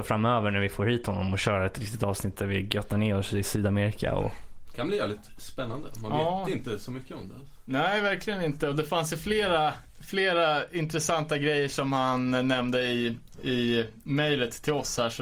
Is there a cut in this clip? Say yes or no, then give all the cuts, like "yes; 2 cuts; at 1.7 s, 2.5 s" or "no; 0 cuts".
no; 0 cuts